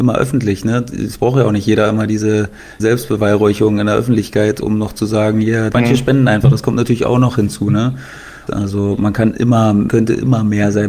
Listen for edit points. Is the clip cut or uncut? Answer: cut